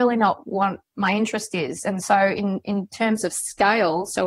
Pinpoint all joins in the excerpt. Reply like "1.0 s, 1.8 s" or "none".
none